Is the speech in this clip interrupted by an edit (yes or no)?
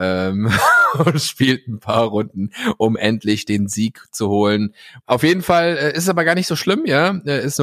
yes